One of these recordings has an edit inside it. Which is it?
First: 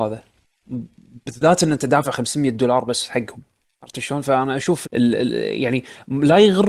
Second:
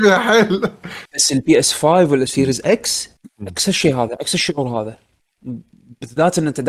first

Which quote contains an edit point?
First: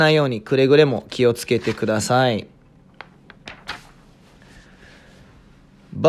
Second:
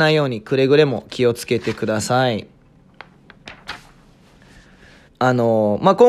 second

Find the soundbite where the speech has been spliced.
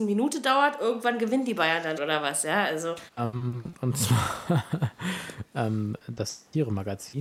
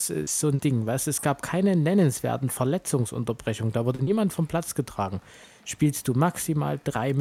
first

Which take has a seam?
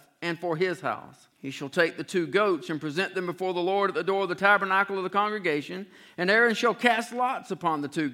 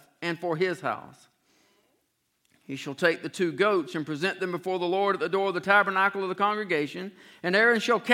first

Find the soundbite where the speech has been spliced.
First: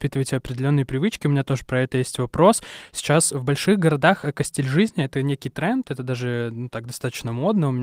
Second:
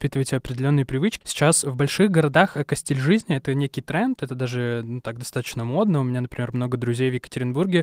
second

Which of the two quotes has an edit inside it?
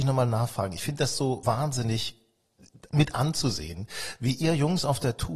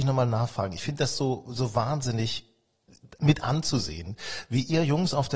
first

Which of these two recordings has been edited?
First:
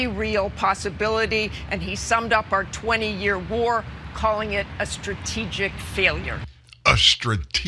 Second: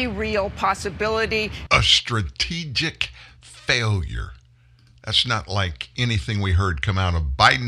second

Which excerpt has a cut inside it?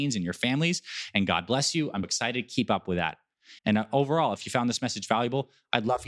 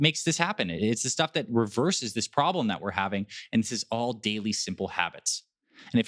first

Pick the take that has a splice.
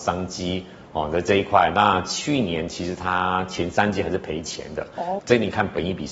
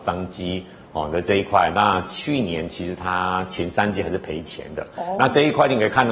first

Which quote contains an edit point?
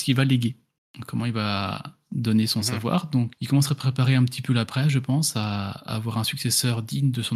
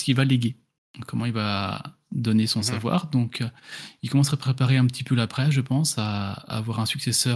first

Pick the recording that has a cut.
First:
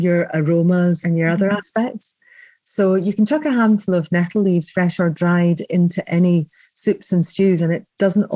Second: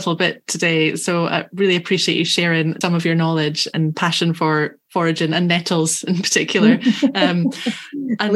second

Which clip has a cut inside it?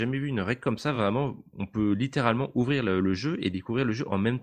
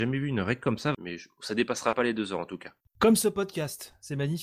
second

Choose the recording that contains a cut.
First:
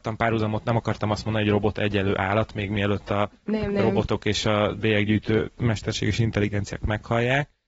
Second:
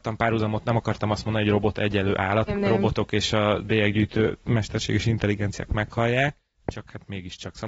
second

